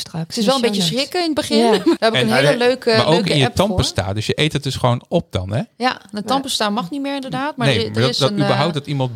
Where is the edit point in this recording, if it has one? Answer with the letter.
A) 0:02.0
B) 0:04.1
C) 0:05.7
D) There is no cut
A